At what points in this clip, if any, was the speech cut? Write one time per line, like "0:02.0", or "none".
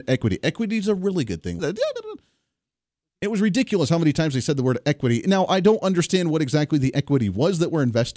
0:01.6

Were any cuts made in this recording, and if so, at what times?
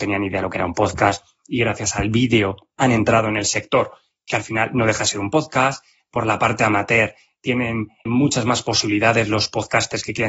0:08.1

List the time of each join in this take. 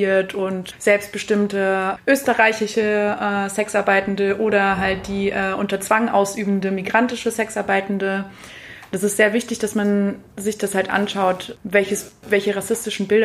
none

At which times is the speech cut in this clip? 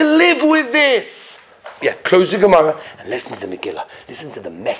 0:01.8

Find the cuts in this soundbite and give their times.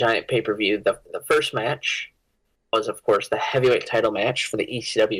0:01.0

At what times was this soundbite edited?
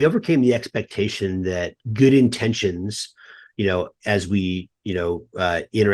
0:04.0

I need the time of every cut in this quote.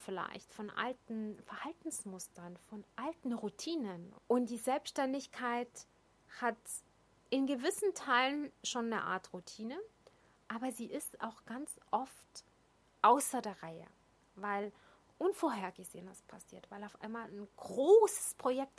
0:04.2

